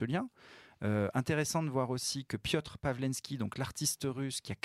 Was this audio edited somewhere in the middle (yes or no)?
no